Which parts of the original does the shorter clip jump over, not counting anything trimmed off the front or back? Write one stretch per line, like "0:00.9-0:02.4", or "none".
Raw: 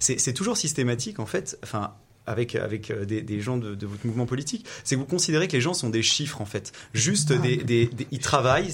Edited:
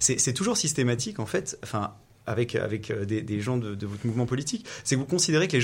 none